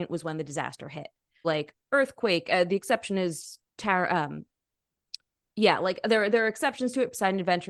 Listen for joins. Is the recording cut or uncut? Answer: cut